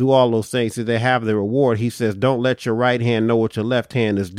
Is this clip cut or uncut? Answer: uncut